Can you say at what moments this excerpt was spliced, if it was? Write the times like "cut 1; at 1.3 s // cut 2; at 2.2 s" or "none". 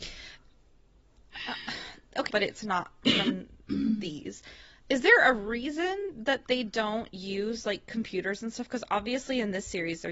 cut 1; at 2.3 s